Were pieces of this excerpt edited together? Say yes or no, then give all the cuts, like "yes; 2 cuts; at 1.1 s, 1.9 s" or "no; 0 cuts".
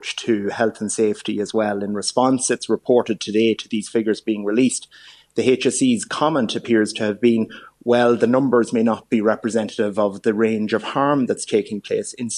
no; 0 cuts